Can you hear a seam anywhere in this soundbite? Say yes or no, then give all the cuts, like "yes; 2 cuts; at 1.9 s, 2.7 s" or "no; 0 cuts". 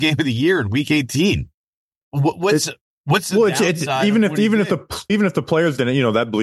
yes; 2 cuts; at 2.0 s, 5.1 s